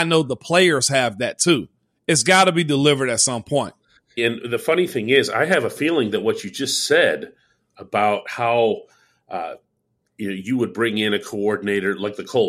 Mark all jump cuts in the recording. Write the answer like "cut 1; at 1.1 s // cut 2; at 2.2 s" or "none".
cut 1; at 4.2 s